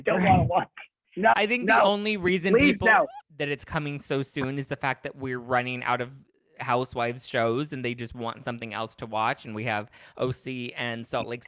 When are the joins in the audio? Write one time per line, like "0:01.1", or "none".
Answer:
0:03.2